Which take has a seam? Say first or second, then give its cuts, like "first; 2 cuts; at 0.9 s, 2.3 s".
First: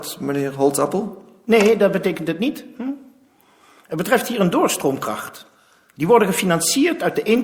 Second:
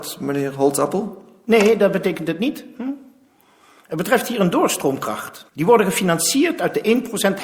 second; 1 cut; at 5.5 s